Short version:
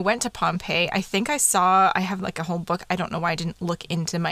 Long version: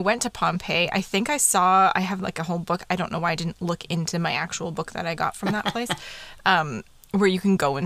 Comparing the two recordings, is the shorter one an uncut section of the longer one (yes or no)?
yes